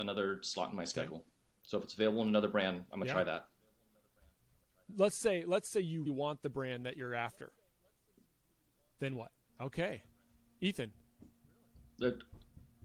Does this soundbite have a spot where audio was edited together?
yes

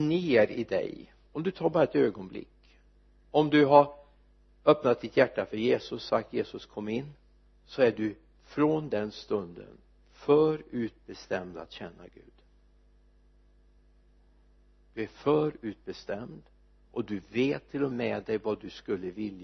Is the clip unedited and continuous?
no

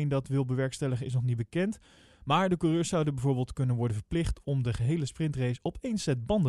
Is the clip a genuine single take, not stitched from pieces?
yes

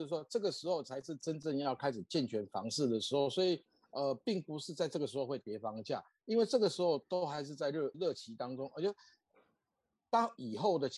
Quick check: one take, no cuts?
no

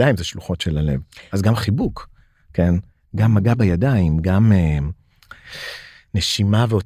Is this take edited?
no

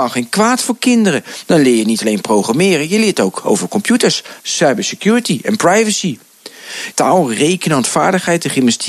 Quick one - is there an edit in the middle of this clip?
yes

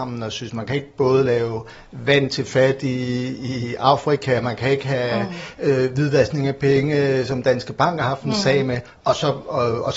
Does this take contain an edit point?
no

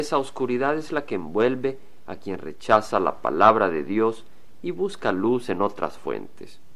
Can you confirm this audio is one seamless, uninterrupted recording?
yes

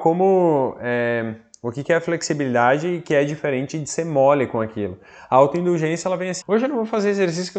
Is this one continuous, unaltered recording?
no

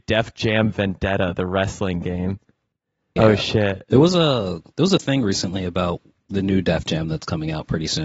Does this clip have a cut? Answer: yes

